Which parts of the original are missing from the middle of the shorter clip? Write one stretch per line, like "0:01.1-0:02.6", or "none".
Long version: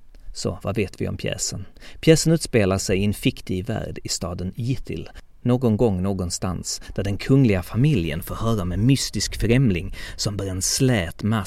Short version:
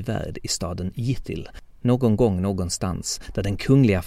none

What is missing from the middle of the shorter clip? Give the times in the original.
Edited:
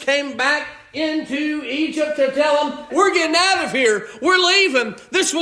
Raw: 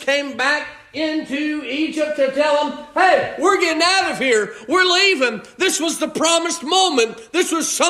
0:02.9-0:03.4

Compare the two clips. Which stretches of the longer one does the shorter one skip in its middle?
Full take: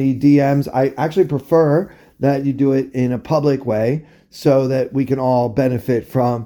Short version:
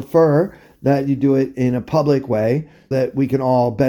0:04.3-0:04.7

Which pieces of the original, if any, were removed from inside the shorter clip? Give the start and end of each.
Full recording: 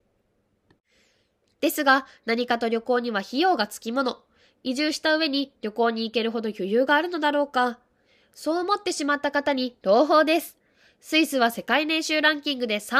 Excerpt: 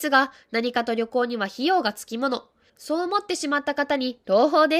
0:04.4-0:08.3

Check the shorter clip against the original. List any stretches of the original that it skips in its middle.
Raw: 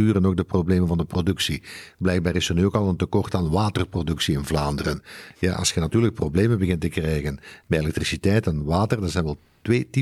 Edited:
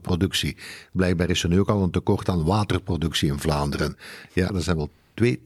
0:05.5-0:09.0

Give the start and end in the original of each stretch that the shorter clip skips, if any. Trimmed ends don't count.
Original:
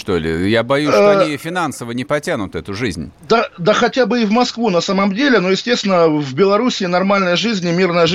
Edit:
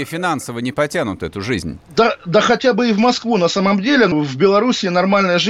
0:05.4-0:06.1

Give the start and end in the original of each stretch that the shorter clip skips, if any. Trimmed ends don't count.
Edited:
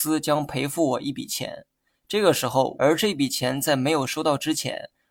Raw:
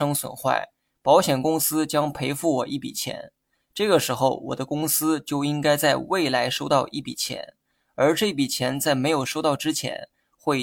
0:04.4-0:07.9

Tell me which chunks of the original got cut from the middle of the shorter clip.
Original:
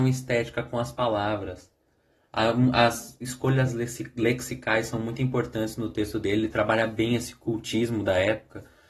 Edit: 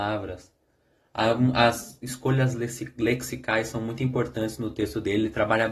none

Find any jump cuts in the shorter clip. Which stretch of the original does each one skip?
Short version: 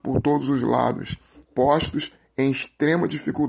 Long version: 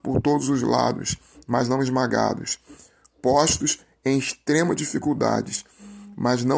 0:01.4-0:03.1

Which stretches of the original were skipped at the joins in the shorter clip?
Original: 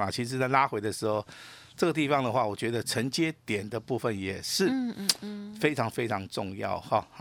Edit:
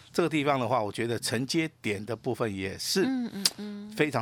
none

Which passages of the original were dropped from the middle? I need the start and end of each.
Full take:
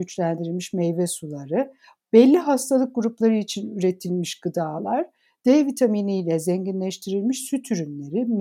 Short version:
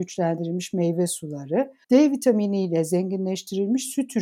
0:01.8-0:05.4

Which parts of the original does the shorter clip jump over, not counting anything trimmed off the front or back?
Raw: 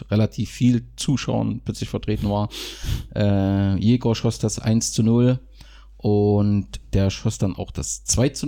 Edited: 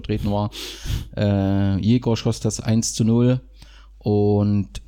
none

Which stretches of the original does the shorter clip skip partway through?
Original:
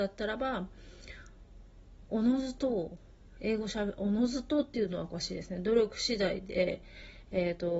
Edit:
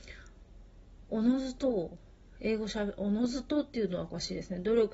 none

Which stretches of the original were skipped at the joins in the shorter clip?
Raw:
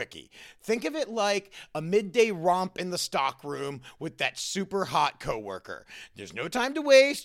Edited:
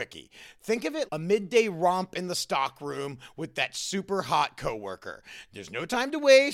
0:01.1-0:01.7

